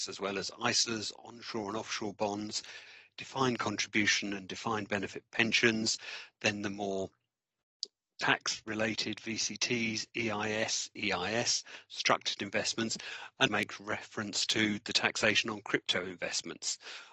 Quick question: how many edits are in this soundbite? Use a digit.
2